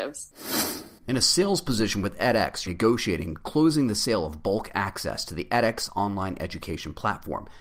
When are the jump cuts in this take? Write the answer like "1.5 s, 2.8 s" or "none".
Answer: 1.0 s, 2.7 s